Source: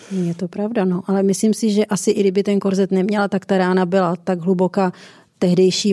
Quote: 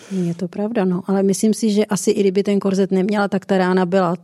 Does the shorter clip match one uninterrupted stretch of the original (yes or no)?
yes